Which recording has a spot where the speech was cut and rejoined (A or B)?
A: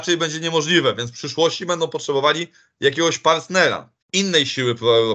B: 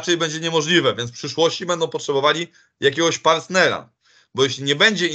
A